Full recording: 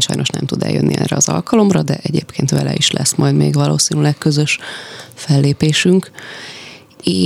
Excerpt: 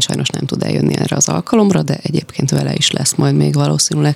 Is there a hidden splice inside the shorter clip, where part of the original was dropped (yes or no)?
no